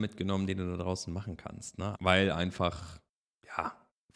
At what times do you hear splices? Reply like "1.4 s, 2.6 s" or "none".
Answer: 1.9 s